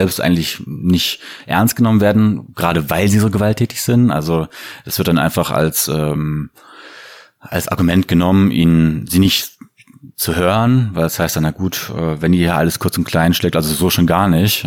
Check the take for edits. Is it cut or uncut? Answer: uncut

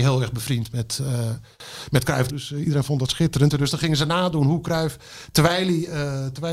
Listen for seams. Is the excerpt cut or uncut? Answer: cut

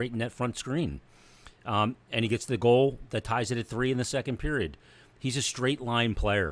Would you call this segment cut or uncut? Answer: uncut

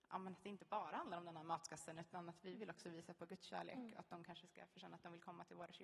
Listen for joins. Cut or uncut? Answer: uncut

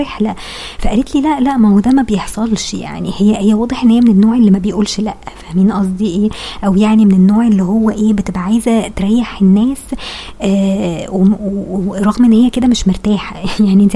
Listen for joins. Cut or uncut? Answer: uncut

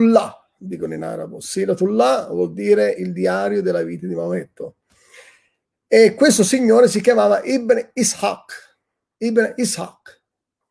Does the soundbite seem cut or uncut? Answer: uncut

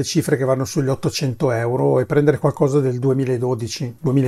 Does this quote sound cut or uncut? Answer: uncut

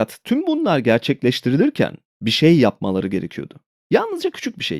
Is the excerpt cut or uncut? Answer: uncut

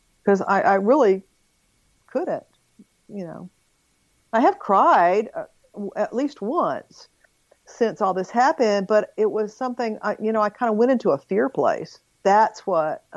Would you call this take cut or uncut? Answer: cut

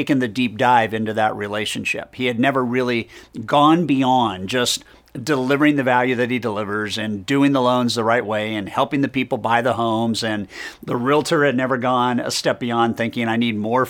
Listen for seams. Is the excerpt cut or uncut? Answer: uncut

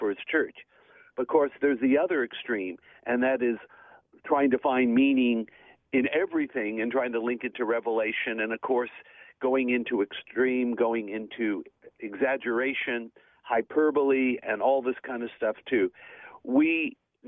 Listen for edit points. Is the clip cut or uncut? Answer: uncut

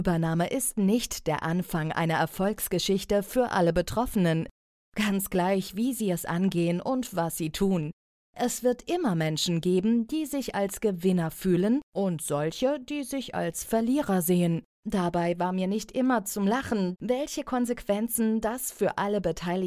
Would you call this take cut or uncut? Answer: cut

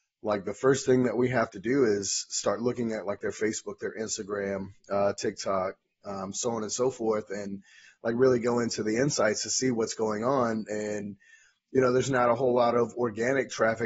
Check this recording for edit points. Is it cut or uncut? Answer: uncut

